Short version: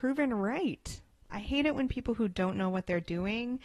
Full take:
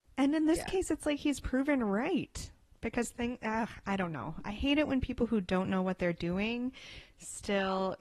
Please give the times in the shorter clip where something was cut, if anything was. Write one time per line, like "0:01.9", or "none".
0:01.3